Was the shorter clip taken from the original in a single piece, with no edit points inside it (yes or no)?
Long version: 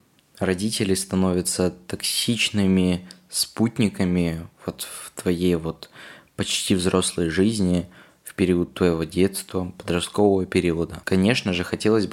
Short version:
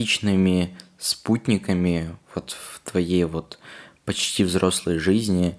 yes